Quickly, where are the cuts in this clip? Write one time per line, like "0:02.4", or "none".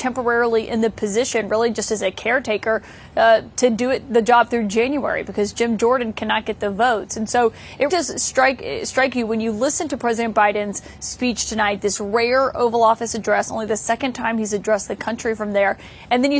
0:07.9